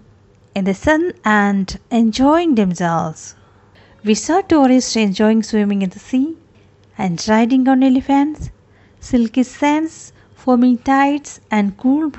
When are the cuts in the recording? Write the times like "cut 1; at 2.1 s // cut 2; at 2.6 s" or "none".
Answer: none